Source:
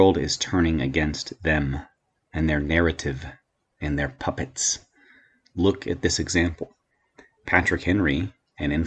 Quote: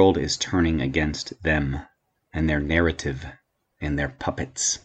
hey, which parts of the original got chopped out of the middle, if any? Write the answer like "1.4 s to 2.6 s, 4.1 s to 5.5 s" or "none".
none